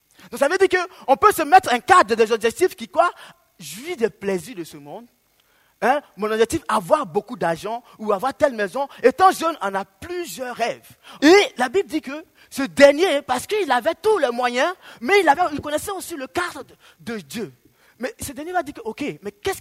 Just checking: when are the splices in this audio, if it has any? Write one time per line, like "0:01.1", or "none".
0:11.2